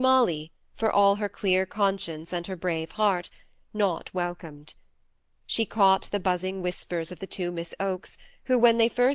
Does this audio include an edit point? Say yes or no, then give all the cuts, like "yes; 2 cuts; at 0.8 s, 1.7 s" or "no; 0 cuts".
yes; 1 cut; at 3.7 s